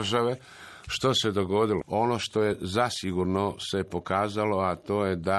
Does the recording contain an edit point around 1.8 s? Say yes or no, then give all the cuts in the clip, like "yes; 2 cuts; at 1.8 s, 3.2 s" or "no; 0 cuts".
yes; 1 cut; at 1.8 s